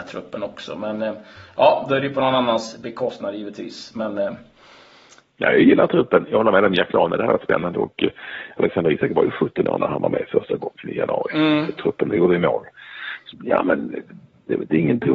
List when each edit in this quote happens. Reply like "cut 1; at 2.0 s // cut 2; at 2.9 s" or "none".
cut 1; at 13.3 s